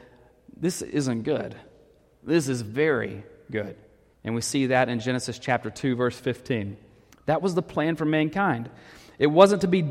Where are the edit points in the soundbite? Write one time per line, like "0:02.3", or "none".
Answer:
0:04.1
0:07.1